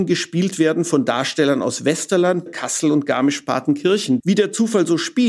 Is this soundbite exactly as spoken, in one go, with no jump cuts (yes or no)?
no